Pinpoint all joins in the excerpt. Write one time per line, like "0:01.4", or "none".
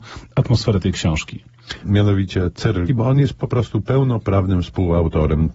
0:01.8
0:02.9